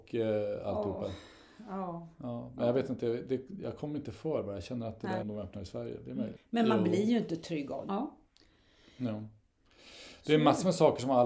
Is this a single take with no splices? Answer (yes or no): no